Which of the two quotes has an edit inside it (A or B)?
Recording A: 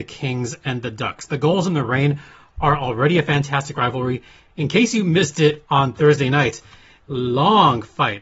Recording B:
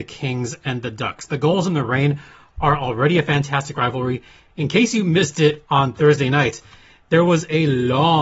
A